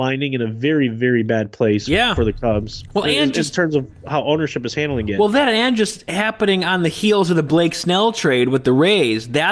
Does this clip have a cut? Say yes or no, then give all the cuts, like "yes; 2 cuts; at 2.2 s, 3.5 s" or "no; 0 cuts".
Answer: no; 0 cuts